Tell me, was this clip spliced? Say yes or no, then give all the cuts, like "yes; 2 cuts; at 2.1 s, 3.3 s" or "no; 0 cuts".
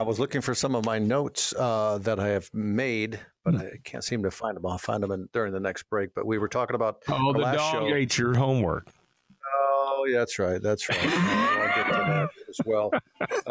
no; 0 cuts